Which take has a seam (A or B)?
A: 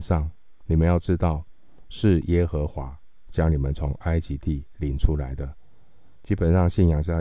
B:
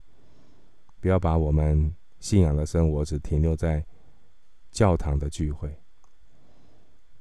A